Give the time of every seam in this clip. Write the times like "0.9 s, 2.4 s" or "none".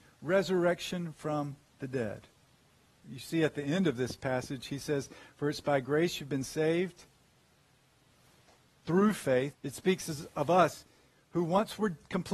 3.0 s, 9.5 s